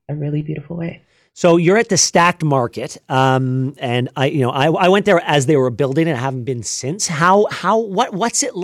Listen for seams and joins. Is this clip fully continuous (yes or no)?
yes